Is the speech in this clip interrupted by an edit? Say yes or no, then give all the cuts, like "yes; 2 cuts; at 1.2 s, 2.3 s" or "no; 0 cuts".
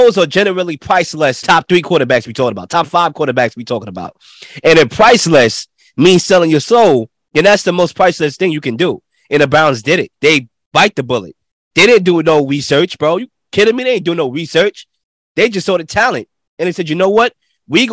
yes; 1 cut; at 10.1 s